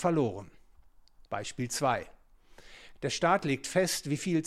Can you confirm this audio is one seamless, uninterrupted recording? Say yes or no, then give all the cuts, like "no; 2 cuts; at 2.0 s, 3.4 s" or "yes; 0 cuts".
no; 2 cuts; at 1.3 s, 3.0 s